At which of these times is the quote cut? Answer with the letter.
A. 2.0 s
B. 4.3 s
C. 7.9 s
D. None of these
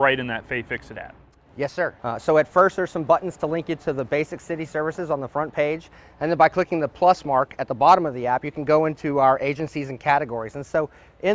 A